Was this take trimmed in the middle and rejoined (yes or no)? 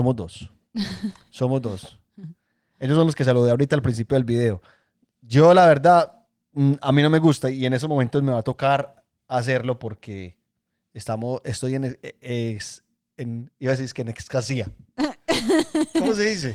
no